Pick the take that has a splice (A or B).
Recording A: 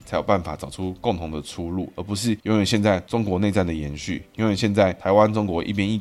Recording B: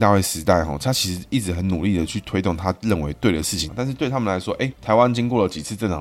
B